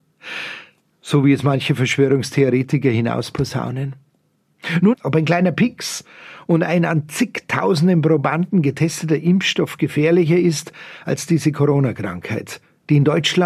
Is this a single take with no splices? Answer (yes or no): no